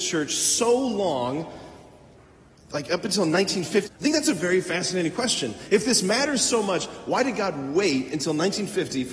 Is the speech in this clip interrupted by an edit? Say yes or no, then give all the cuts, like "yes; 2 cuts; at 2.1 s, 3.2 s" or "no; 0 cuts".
yes; 1 cut; at 3.9 s